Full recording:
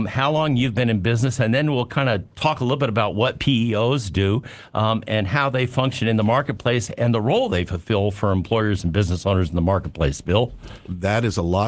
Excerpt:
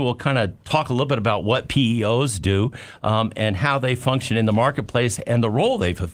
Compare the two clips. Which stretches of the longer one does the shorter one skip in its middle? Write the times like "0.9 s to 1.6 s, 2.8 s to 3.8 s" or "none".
none

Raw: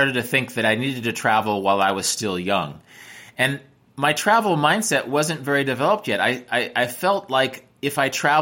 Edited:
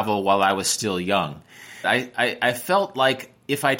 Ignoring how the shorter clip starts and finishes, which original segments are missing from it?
3.2 s to 6.2 s

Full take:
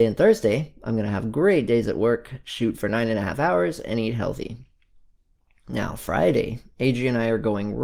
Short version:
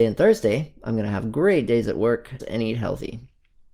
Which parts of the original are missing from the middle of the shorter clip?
2.4 s to 3.8 s

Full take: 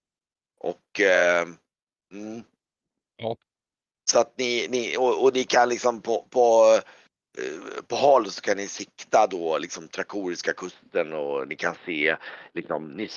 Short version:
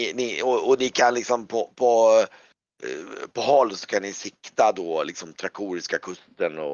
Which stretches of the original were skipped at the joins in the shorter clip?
none

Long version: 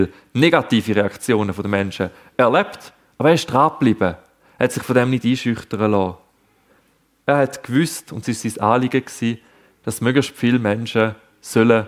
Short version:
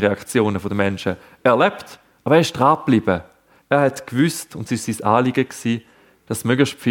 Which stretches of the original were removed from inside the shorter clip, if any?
4.5 s to 7.2 s

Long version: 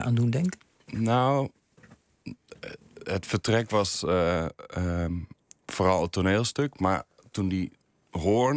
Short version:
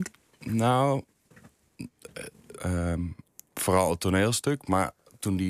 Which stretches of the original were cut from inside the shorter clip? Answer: 3.0 s to 4.7 s

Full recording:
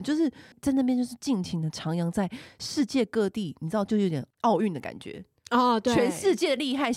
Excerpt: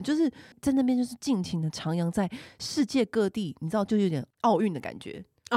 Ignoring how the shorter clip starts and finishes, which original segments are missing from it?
none

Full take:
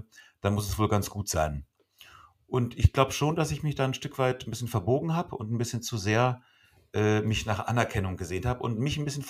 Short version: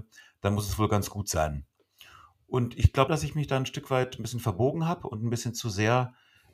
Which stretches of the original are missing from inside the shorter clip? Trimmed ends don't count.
3.1 s to 3.4 s

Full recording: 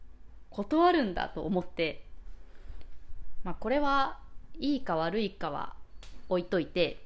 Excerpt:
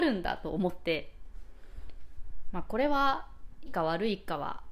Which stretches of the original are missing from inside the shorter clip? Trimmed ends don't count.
4.6 s to 4.8 s

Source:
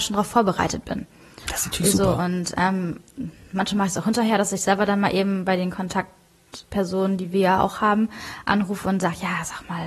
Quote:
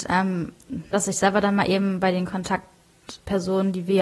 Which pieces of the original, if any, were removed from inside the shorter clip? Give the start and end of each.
3.4 s to 4.4 s

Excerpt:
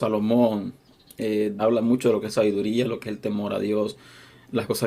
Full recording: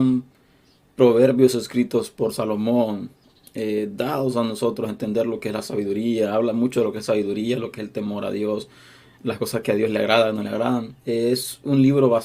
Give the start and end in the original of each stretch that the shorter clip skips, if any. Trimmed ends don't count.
4.0 s to 6.3 s

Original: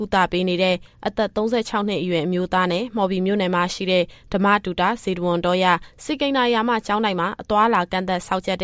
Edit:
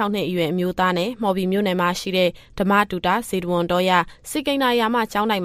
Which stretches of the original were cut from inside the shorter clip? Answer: none

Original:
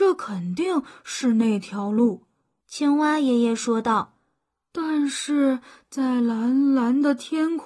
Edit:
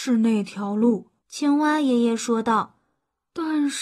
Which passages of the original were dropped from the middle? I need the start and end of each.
2.3 s to 2.6 s

